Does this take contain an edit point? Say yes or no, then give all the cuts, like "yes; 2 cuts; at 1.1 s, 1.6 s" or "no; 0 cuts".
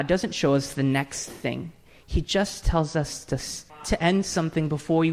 yes; 1 cut; at 3.7 s